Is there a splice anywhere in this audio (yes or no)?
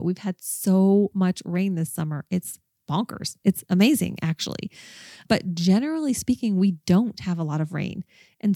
no